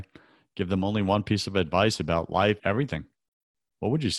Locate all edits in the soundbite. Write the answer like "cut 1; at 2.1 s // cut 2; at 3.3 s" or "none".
cut 1; at 2.6 s